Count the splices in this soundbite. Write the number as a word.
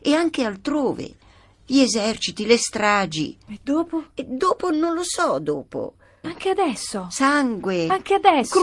two